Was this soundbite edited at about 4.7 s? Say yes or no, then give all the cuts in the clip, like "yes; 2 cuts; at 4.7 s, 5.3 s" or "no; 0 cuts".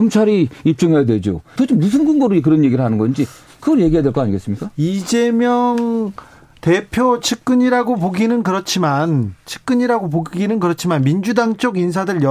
no; 1 cut; at 1.6 s